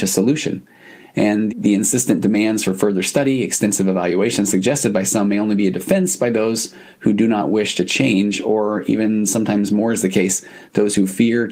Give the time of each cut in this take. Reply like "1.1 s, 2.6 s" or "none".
1.5 s